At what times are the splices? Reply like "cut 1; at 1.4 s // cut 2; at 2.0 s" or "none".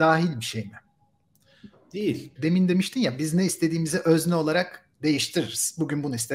cut 1; at 2.4 s